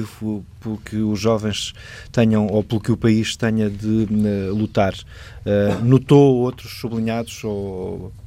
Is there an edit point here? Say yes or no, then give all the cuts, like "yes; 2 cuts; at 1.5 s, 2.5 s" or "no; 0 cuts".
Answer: no; 0 cuts